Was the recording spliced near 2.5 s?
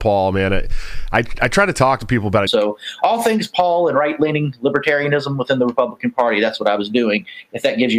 yes; 1 cut; at 2.5 s

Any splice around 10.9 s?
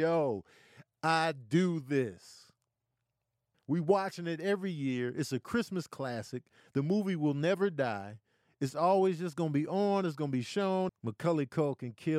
yes; 2 cuts; at 3.5 s, 10.9 s

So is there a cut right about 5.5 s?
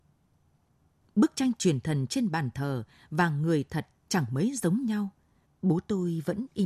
yes; 2 cuts; at 1.0 s, 5.5 s

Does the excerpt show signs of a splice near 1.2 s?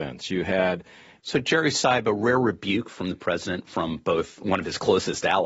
yes; 1 cut; at 1.2 s

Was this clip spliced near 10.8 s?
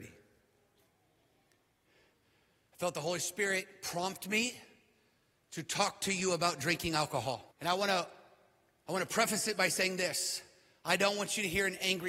no; 1 cut; at 7.5 s

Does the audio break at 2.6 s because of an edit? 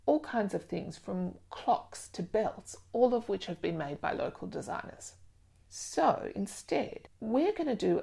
no; 1 cut; at 5.6 s

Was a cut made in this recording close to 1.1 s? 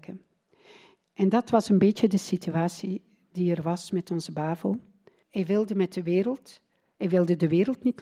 no; 1 cut; at 5.2 s

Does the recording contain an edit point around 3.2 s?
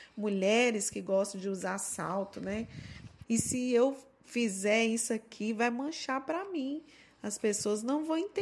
yes; 1 cut; at 3.2 s

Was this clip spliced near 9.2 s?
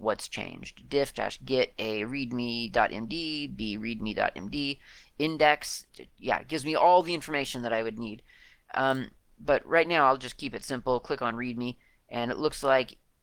no; 1 cut; at 1.1 s

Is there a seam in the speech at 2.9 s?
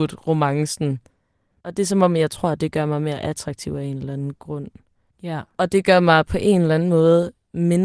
no; 2 cuts; at 1.5 s, 5.1 s

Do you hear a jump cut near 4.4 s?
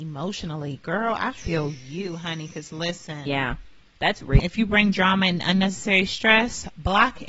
yes; 1 cut; at 4.4 s

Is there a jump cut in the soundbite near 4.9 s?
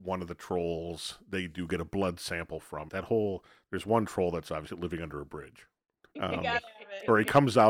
no; 2 cuts; at 2.9 s, 6.2 s

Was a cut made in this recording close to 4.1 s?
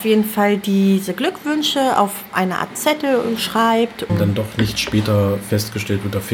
yes; 1 cut; at 4.1 s

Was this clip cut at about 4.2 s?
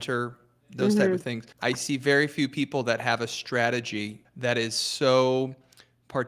yes; 2 cuts; at 1.5 s, 4.2 s

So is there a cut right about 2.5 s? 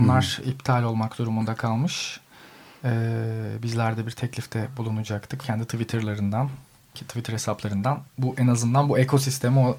no; 1 cut; at 5.4 s

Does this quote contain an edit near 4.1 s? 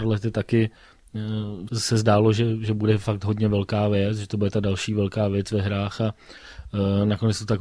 no; 1 cut; at 1.7 s

